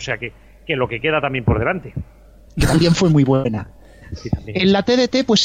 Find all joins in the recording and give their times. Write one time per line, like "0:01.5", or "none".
0:02.5